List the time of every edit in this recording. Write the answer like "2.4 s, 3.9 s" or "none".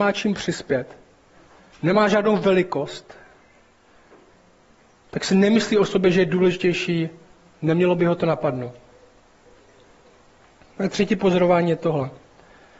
none